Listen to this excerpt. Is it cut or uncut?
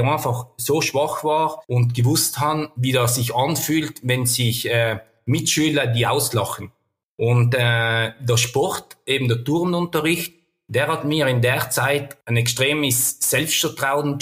uncut